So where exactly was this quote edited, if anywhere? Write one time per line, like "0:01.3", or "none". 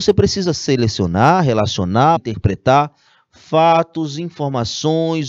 0:02.2